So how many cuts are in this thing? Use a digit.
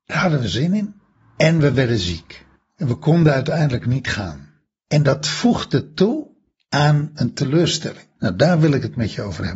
1